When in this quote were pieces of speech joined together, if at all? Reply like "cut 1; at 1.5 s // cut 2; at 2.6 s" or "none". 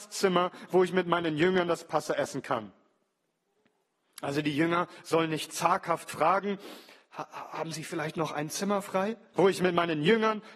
cut 1; at 9.3 s